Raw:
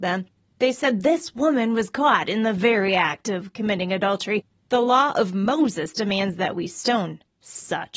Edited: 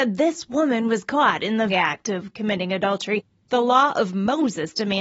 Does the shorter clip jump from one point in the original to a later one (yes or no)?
yes